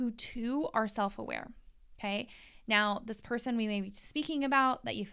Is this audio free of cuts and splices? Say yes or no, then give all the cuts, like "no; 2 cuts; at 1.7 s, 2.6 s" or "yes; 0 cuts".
yes; 0 cuts